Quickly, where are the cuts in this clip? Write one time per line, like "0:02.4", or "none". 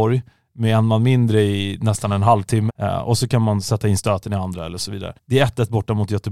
0:02.7
0:05.2